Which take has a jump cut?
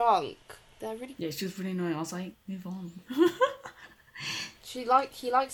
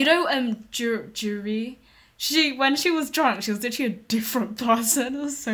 first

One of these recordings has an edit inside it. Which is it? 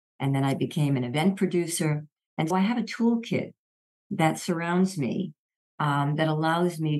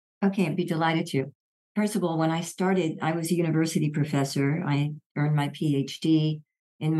first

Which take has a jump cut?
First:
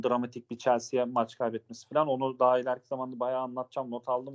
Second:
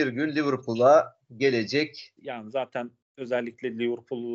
second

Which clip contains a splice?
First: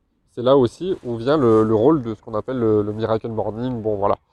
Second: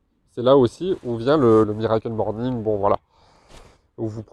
second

